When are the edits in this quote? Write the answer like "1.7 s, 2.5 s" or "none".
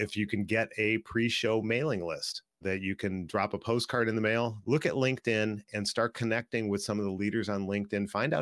2.6 s, 4.6 s